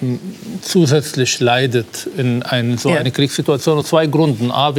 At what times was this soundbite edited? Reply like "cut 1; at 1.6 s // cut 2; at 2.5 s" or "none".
none